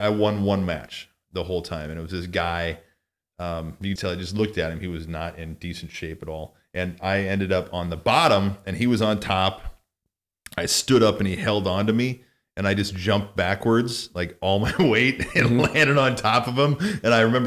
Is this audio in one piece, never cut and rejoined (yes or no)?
no